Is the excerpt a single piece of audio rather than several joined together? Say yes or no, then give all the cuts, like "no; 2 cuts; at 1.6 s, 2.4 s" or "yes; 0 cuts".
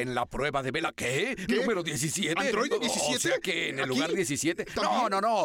yes; 0 cuts